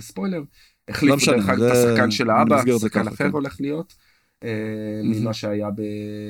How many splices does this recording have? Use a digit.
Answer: 0